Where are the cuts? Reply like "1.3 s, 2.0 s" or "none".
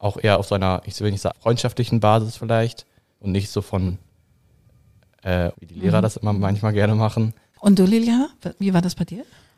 1.3 s, 5.5 s, 7.5 s